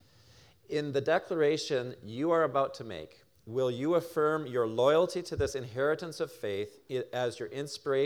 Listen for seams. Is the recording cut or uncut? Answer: uncut